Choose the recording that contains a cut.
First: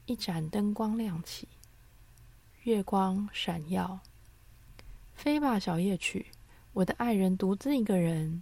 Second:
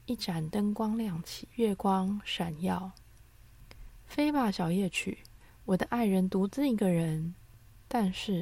second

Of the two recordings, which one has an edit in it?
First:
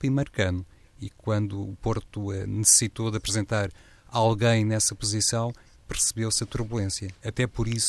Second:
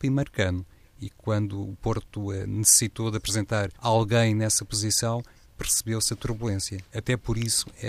second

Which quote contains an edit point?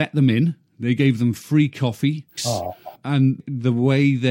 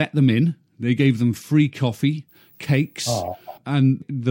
first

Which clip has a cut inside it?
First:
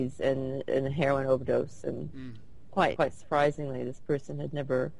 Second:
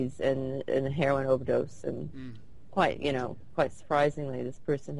first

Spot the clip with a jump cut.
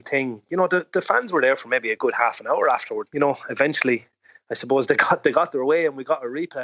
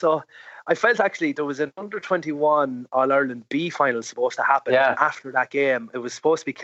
first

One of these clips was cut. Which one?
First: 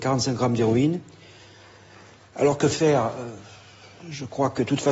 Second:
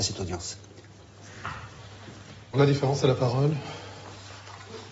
second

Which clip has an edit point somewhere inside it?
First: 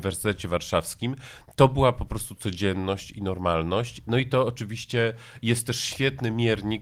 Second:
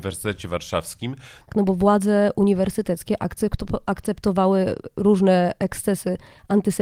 second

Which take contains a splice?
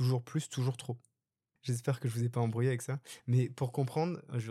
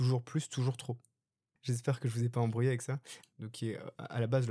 second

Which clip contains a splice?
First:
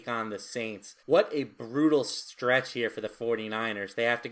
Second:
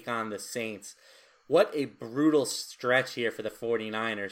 first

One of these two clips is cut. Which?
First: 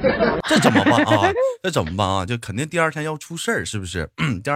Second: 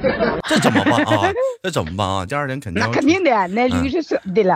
second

